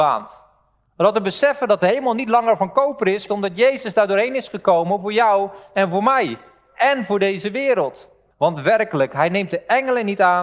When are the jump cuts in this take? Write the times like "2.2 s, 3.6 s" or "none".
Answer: 3.3 s, 8.3 s